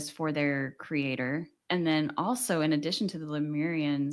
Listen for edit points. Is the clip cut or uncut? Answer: cut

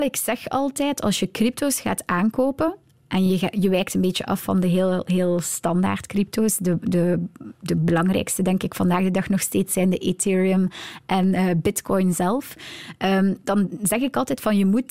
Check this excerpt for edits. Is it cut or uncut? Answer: uncut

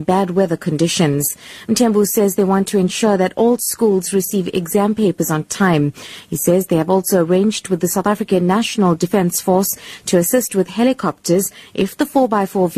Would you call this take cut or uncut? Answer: uncut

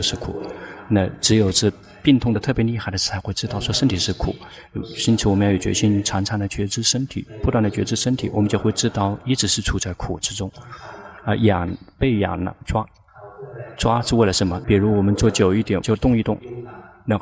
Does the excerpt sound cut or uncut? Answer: cut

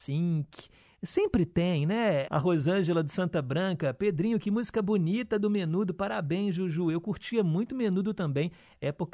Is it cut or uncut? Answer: cut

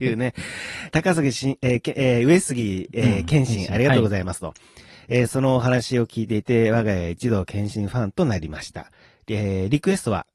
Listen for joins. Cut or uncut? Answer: uncut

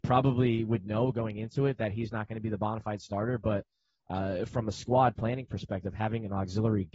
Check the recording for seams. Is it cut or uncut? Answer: uncut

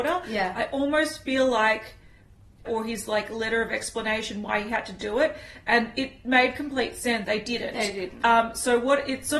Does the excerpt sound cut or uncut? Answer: cut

